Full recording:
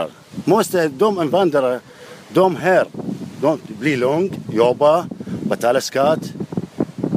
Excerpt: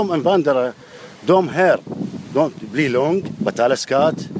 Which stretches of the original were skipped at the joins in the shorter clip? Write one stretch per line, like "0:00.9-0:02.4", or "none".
0:04.5-0:05.4